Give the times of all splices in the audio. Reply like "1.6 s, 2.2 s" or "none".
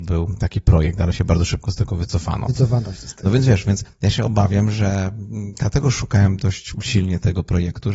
none

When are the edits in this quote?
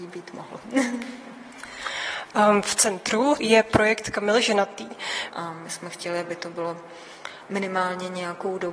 5.3 s

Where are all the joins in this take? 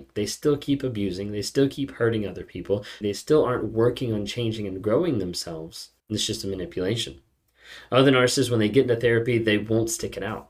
3.0 s, 6.0 s

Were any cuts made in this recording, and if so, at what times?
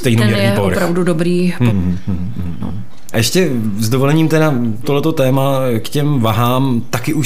1.7 s, 3.1 s, 4.8 s

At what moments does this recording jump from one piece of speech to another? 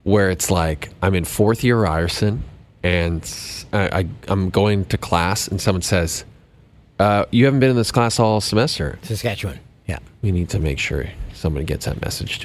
6.9 s, 9.0 s

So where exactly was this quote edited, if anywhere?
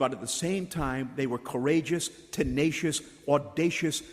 none

